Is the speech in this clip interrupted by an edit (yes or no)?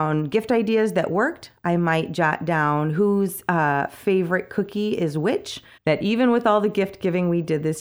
yes